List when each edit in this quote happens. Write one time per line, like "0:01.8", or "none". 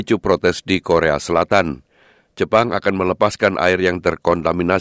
none